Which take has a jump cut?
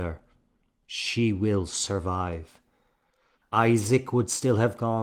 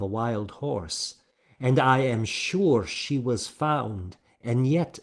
first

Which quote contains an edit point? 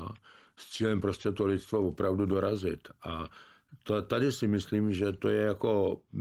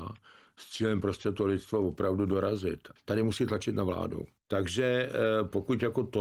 second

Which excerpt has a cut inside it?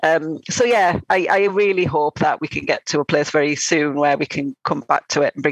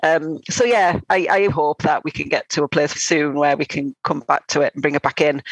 second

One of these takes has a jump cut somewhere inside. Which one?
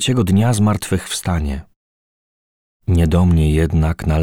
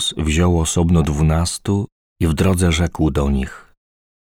first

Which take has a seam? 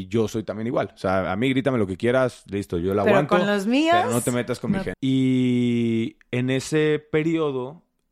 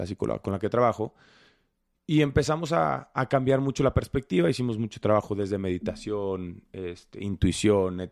first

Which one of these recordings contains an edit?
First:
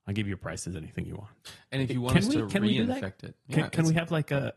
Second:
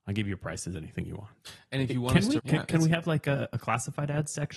second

